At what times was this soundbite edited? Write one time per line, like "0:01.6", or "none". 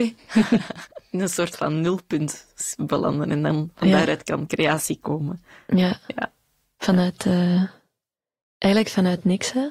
none